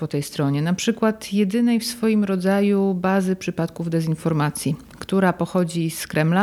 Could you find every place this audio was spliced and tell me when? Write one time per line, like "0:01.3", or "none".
none